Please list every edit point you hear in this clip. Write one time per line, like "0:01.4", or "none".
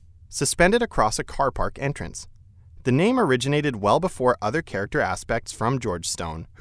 none